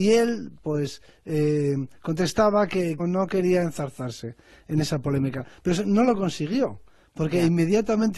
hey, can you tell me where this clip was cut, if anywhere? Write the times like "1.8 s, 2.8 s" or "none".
3.0 s